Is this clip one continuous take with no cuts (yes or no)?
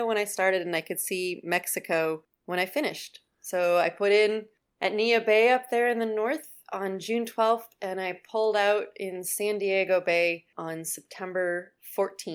yes